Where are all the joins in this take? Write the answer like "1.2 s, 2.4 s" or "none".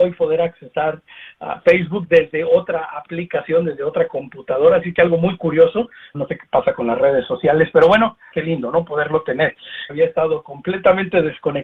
6.1 s, 8.3 s, 9.9 s